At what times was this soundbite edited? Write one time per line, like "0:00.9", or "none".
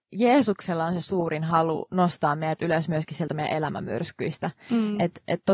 none

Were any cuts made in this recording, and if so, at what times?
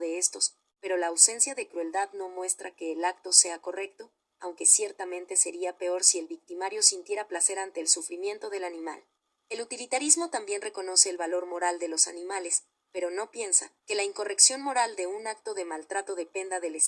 0:09.3
0:13.8

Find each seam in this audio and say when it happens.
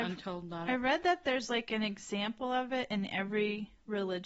none

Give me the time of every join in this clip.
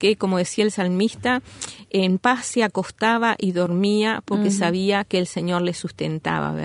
none

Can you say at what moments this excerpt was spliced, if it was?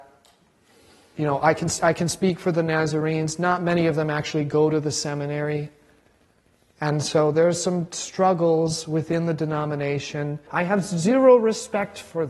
0:10.5

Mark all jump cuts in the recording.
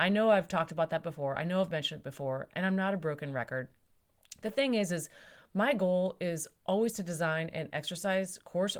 none

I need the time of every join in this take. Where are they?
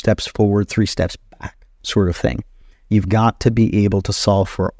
none

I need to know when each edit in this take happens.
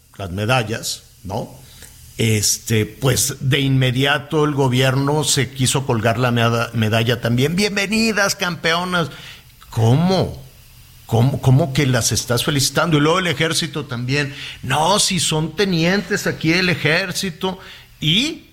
none

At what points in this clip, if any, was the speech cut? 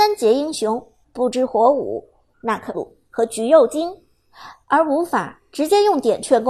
0:01.0
0:02.7
0:04.6

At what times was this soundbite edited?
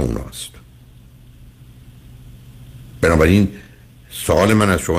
none

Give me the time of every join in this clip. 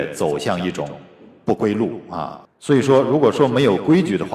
0:02.4

